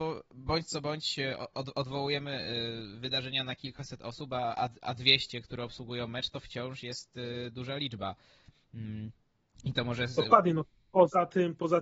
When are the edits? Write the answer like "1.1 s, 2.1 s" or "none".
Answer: none